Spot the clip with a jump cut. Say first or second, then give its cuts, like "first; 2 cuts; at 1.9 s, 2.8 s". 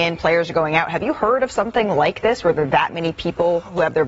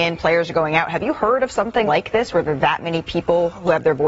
second; 1 cut; at 1.9 s